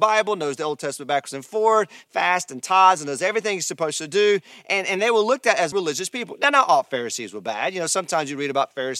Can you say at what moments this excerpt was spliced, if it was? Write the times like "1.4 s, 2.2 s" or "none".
5.7 s